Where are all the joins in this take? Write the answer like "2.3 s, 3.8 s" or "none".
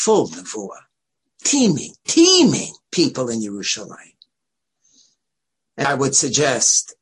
2.8 s, 5.8 s